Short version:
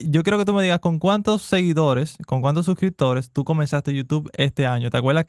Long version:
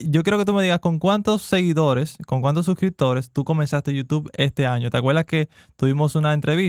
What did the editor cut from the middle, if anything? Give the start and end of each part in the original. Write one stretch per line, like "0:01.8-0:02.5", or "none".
none